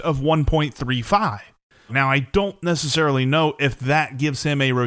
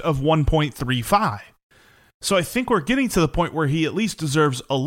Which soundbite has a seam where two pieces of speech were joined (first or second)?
first